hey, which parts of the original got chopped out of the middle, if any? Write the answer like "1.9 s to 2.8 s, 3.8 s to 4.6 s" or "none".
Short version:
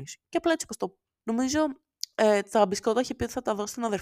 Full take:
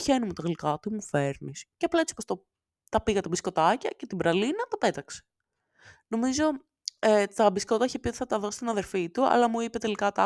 2.7 s to 6.1 s